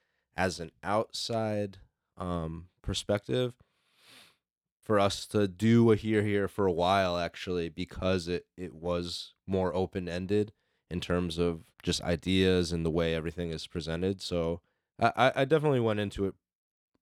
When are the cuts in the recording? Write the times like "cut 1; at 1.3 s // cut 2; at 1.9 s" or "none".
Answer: cut 1; at 4.8 s // cut 2; at 11.7 s

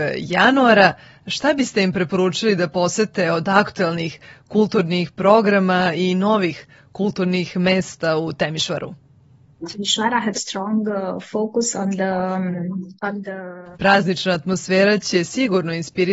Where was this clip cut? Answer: cut 1; at 10.3 s // cut 2; at 13.7 s

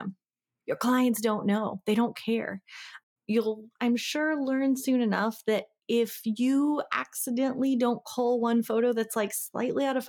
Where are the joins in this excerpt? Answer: none

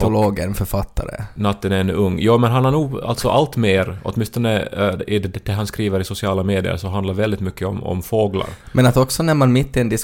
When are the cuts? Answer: none

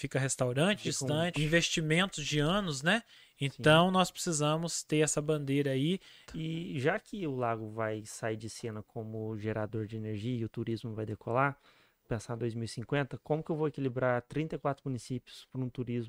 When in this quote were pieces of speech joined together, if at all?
cut 1; at 1.3 s // cut 2; at 6.2 s // cut 3; at 12.0 s

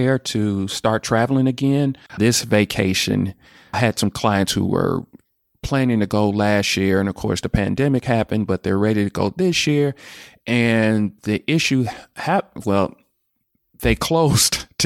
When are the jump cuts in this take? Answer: cut 1; at 2.1 s

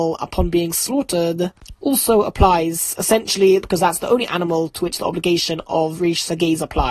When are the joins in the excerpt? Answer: cut 1; at 3.6 s

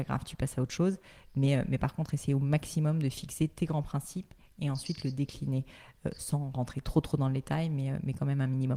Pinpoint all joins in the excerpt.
none

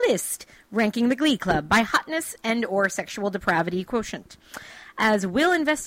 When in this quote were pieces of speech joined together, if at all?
none

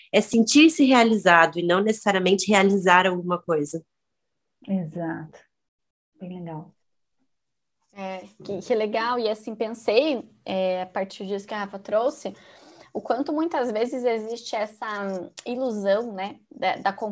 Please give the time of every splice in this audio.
none

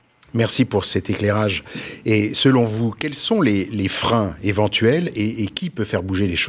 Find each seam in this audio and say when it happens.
none

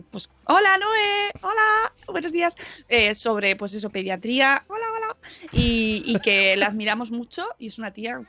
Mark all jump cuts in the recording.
cut 1; at 4.7 s

